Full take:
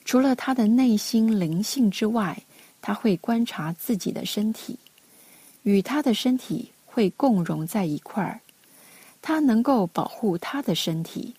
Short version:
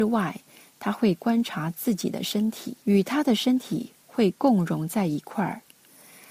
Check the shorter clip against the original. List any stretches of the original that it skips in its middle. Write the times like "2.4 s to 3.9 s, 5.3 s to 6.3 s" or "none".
4.8 s to 5.6 s